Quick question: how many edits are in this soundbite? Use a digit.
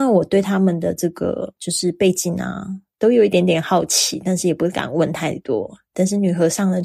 1